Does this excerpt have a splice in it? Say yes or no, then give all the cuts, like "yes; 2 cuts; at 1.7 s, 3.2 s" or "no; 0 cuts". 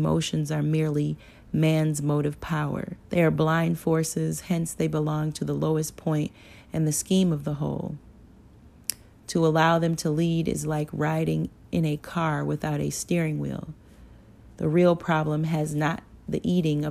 yes; 1 cut; at 3.0 s